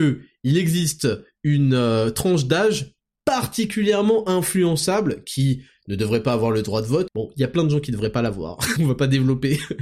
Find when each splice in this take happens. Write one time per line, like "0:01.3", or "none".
0:07.1
0:08.8